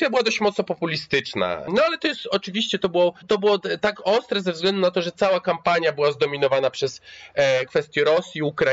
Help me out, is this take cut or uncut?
cut